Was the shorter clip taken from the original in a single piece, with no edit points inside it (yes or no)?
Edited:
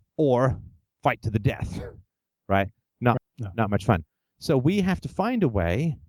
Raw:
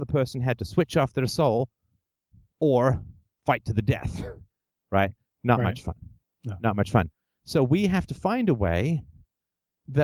no